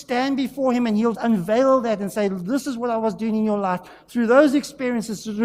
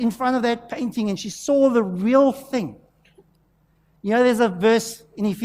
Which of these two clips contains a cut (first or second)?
first